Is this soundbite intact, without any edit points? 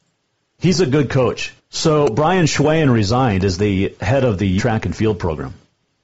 no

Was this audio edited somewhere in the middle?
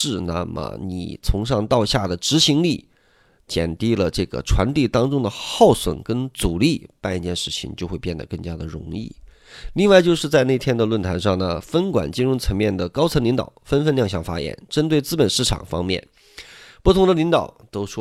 no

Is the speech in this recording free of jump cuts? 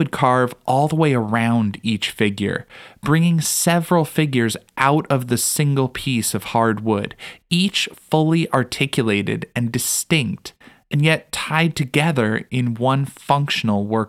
yes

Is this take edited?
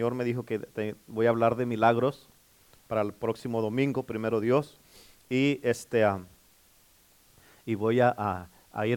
no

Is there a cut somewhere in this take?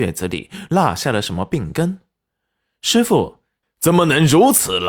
yes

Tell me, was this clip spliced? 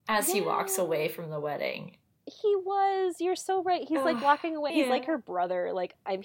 yes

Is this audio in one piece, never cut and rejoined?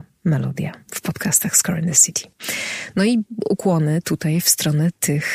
yes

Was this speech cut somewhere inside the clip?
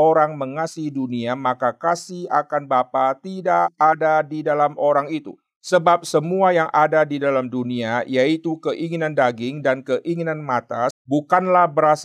yes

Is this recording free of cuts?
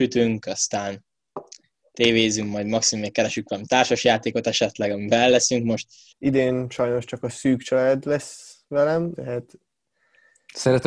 no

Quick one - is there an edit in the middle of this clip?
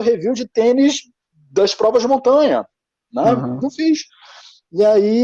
no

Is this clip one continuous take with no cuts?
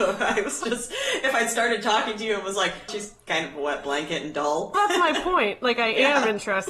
no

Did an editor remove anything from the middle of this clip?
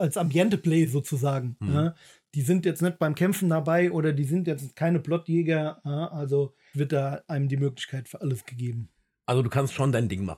yes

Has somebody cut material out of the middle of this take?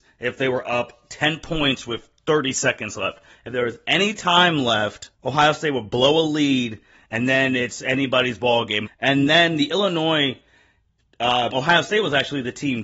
yes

